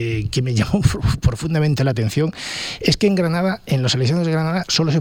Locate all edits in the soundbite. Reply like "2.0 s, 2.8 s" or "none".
none